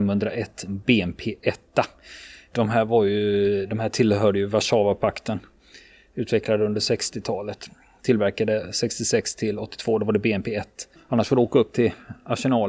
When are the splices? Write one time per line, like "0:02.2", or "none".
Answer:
0:11.0